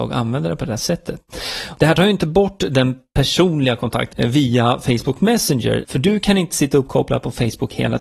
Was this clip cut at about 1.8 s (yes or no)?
no